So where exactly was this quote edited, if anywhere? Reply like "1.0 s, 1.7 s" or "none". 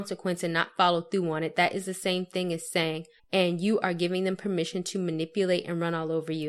3.2 s